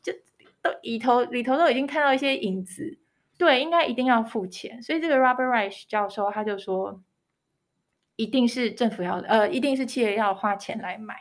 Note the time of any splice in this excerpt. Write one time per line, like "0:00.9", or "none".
0:03.3